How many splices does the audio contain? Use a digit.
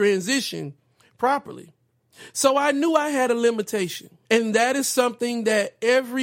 1